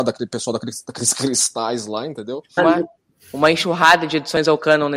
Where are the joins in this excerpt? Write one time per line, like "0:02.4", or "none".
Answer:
0:02.6